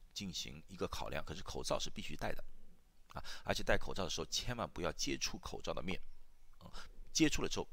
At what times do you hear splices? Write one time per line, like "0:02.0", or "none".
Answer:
none